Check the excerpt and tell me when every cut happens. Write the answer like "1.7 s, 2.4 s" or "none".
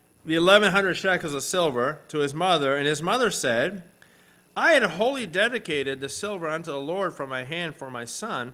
none